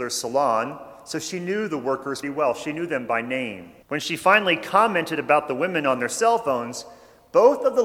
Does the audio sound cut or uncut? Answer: cut